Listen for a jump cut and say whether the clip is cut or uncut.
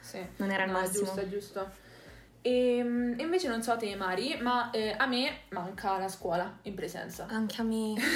uncut